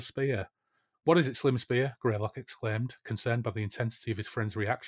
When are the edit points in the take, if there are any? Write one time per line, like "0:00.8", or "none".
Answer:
0:00.9